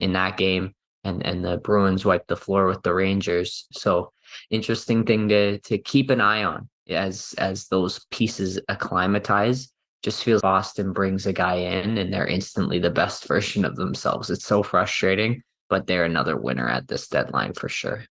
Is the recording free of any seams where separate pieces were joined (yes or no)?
no